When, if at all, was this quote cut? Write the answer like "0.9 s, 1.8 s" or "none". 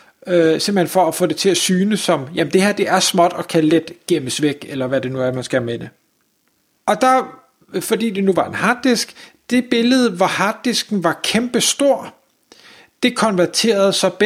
6.8 s